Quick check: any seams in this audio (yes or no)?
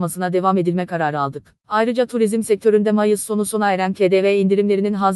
no